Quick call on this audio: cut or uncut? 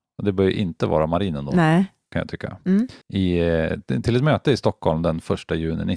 cut